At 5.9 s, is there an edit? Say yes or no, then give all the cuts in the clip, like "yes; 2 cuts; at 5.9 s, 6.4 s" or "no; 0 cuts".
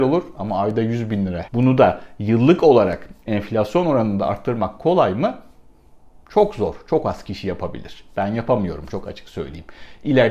no; 1 cut; at 1.4 s